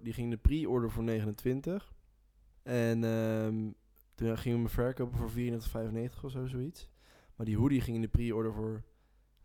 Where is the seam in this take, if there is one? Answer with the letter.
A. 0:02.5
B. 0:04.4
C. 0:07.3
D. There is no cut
A